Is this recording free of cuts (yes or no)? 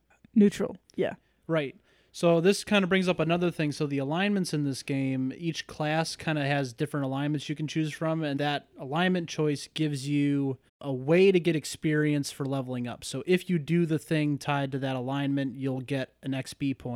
no